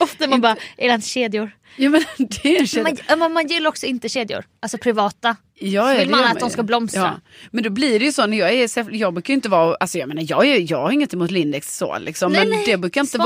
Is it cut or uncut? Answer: uncut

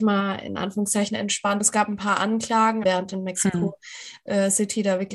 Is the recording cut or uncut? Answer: cut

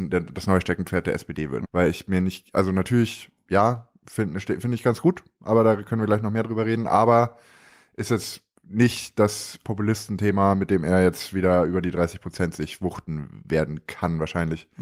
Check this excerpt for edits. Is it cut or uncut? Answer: cut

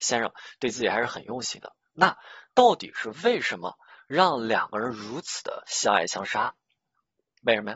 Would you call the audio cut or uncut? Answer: uncut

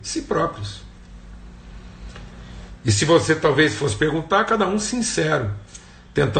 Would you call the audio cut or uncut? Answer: uncut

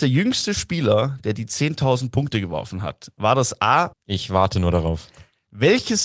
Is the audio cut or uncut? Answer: cut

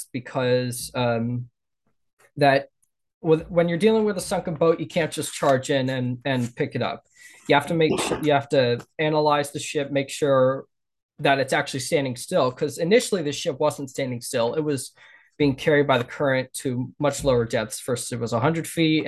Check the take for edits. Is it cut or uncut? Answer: uncut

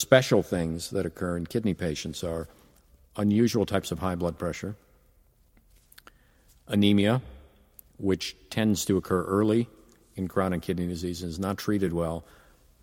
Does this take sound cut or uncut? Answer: uncut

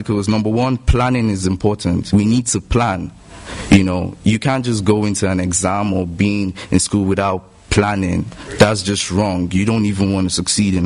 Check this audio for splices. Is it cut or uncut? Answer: uncut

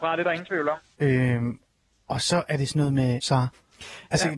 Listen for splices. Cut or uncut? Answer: cut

